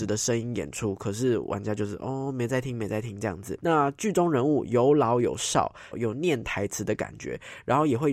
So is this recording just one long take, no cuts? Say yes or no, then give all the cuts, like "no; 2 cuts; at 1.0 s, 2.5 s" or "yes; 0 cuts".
no; 2 cuts; at 3.6 s, 5.9 s